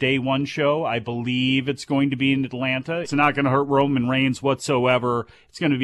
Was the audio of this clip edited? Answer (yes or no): yes